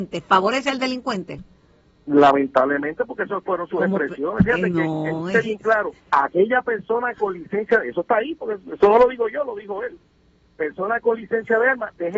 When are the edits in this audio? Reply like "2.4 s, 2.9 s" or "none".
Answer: 6.0 s

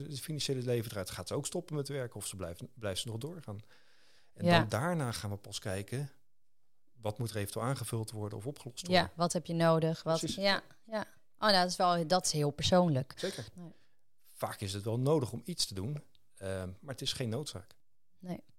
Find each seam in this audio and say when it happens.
13.5 s

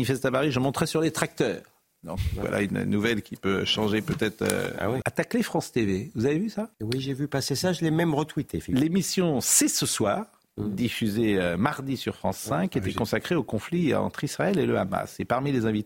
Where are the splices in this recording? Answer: 5.0 s, 6.7 s

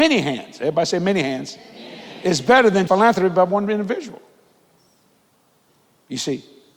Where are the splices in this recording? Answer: 2.9 s

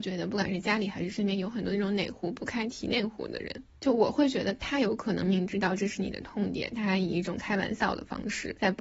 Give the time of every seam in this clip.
5.2 s

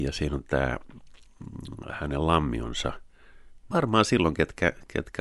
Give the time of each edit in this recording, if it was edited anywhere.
3.7 s

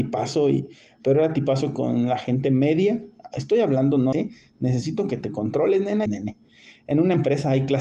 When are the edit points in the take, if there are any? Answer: 4.1 s, 6.1 s

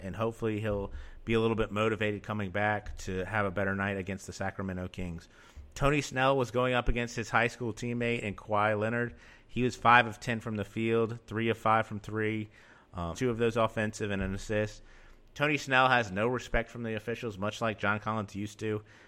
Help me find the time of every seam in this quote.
13.1 s

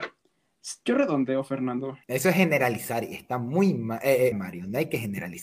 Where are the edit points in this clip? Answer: 2.0 s, 4.3 s

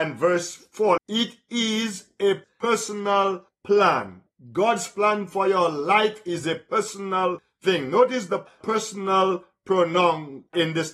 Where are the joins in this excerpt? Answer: 1.0 s

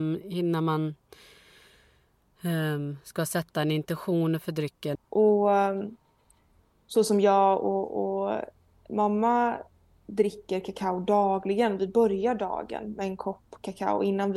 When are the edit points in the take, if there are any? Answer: 5.0 s

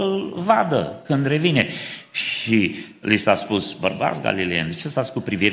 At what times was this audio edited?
none

